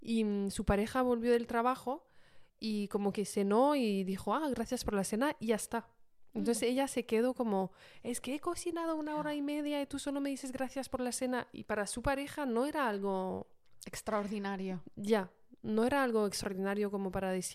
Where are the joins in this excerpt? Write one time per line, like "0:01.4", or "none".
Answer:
0:02.5